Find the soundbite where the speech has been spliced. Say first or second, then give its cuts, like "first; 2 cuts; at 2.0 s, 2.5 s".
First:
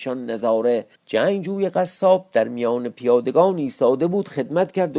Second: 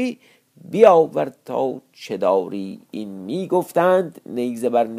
first; 1 cut; at 0.9 s